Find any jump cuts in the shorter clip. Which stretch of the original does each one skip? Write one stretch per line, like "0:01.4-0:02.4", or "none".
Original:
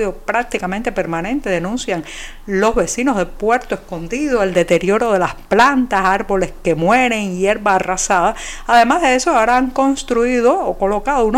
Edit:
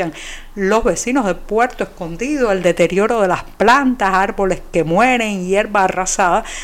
none